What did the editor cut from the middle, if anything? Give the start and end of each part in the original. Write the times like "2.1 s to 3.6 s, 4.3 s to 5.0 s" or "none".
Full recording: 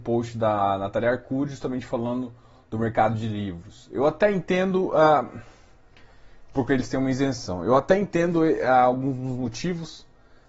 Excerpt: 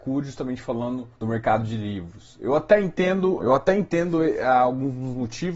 2.4 s to 2.6 s, 4.9 s to 7.6 s